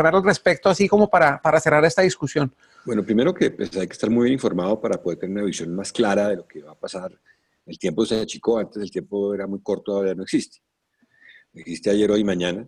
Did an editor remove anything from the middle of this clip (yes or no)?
no